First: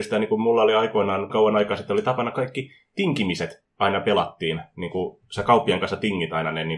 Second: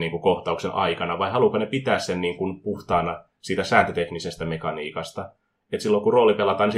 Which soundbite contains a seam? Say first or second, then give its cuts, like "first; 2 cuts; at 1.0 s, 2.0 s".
first; 1 cut; at 1.3 s